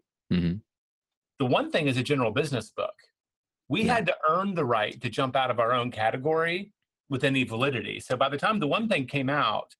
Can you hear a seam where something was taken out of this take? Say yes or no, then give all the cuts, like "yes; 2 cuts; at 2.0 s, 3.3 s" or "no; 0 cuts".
no; 0 cuts